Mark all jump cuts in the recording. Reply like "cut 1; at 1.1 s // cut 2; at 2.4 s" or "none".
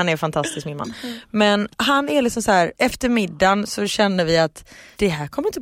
cut 1; at 2.7 s